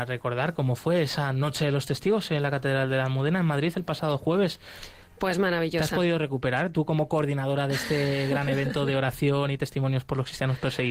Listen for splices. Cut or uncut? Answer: uncut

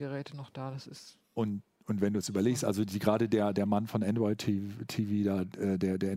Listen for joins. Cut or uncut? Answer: uncut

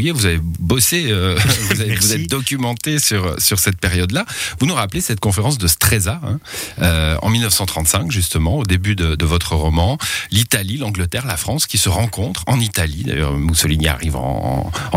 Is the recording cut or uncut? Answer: uncut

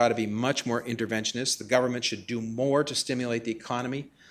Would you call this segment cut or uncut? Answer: uncut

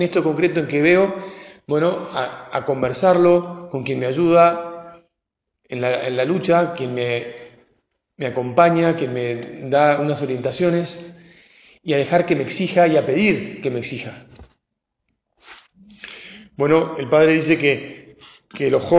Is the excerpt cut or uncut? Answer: uncut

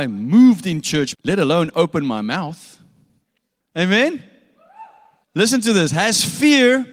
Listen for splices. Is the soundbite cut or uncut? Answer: cut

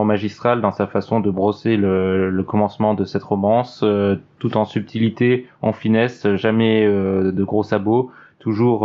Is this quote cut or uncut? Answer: uncut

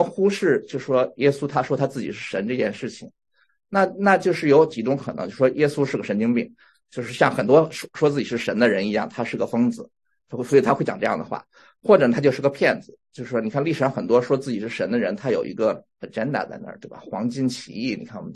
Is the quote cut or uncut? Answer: uncut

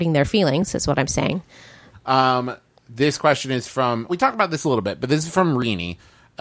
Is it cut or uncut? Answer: cut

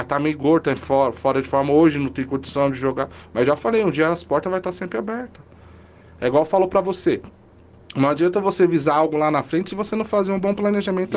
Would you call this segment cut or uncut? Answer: uncut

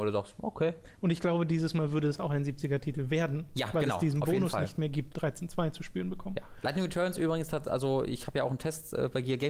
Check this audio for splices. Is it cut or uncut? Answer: cut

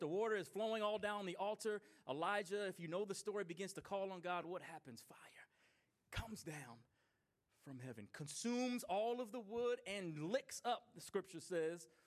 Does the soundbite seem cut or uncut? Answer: uncut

